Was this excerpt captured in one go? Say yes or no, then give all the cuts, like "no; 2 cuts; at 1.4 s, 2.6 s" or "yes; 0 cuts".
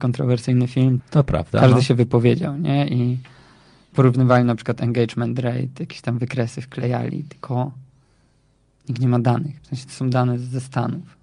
no; 1 cut; at 1.0 s